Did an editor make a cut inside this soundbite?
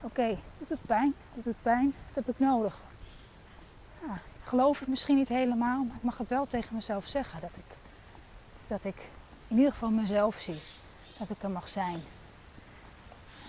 no; 0 cuts

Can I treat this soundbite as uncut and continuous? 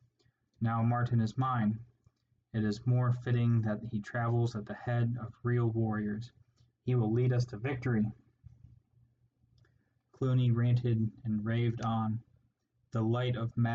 yes; 0 cuts

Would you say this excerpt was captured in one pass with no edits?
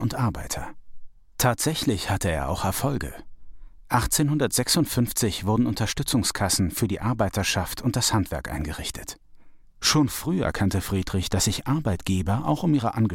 no; 1 cut; at 9.7 s

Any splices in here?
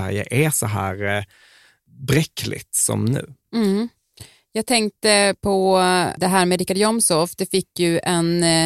no; 0 cuts

